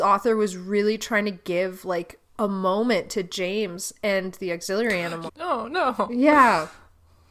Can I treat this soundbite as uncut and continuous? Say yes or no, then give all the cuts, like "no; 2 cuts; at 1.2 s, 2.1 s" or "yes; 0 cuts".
no; 1 cut; at 5.3 s